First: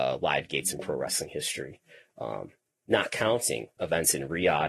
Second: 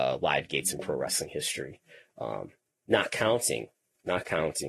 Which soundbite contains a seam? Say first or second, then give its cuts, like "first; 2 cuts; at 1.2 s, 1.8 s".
first; 1 cut; at 3.8 s